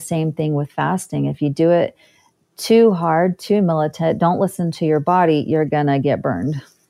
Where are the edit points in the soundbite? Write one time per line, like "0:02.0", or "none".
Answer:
none

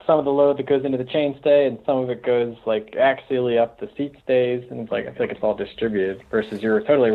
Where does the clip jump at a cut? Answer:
none

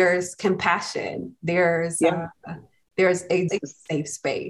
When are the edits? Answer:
0:03.5

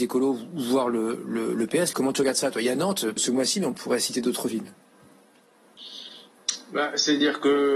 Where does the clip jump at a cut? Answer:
0:01.9
0:03.2

